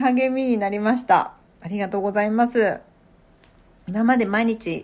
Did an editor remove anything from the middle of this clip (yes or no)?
no